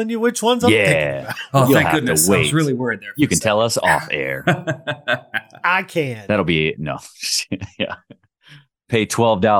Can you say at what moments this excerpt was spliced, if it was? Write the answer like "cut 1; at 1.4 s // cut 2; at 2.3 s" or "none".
none